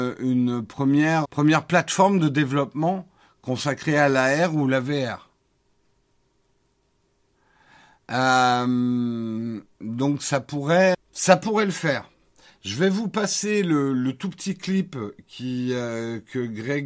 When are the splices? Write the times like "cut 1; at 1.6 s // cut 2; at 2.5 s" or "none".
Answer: cut 1; at 1.2 s // cut 2; at 10.9 s